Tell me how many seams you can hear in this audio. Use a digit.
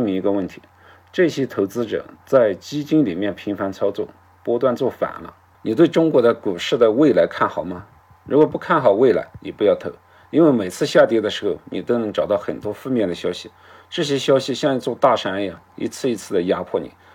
1